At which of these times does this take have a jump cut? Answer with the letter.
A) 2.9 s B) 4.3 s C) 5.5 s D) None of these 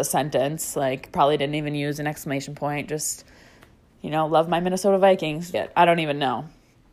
C